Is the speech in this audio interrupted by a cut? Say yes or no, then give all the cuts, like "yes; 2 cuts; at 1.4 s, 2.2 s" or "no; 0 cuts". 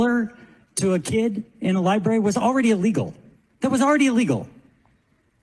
no; 0 cuts